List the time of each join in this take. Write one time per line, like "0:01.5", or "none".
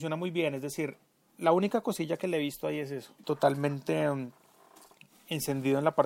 0:03.2